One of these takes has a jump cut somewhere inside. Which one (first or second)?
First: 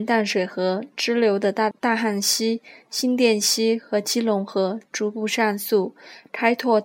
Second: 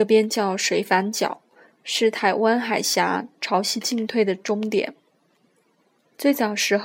first